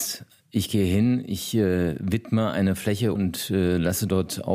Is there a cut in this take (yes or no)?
yes